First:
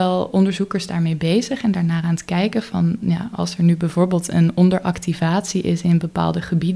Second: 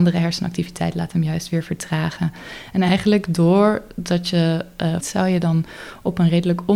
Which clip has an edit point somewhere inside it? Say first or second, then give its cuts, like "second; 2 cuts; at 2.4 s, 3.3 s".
second; 1 cut; at 5.0 s